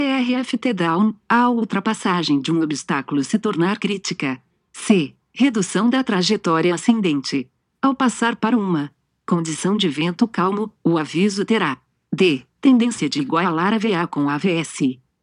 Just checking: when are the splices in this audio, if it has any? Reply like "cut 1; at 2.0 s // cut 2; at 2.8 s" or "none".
cut 1; at 4.7 s // cut 2; at 7.7 s